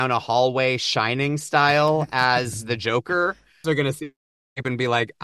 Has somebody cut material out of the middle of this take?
yes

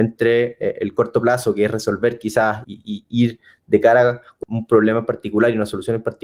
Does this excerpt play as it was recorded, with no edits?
no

